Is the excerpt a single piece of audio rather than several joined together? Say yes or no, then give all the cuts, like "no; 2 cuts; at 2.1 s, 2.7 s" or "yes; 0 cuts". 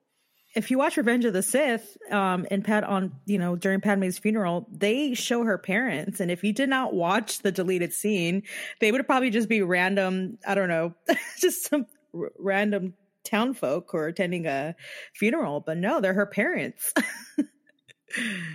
yes; 0 cuts